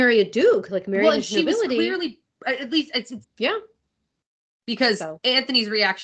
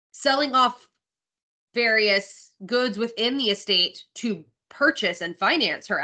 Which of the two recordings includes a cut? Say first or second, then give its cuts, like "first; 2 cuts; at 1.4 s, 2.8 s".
first; 1 cut; at 3.2 s